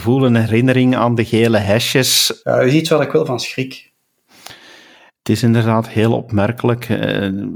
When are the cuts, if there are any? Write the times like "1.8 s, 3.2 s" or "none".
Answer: 2.4 s